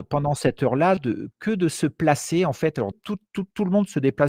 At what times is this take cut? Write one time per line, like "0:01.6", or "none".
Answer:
0:02.9